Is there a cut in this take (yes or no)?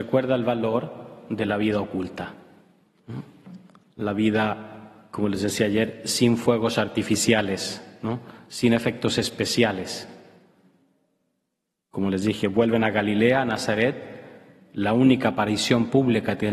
no